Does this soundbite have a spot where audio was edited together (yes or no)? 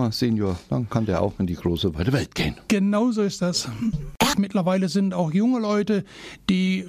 yes